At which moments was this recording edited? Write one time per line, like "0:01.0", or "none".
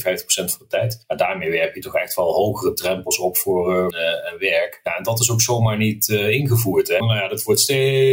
0:03.9
0:07.0